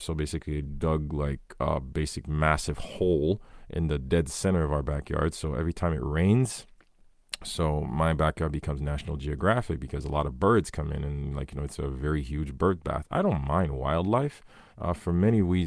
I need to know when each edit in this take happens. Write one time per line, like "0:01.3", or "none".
0:14.7